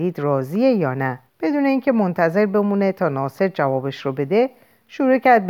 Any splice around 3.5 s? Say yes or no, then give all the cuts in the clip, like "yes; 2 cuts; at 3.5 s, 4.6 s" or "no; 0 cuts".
no; 1 cut; at 1.3 s